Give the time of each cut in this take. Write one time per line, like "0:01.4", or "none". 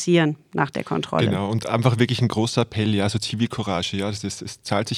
none